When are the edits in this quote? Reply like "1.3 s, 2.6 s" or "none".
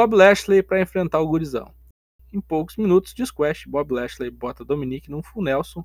2.2 s